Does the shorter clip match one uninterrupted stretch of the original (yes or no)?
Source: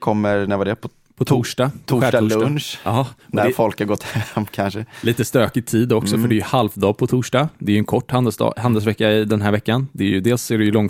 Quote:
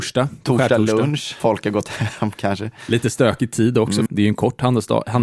no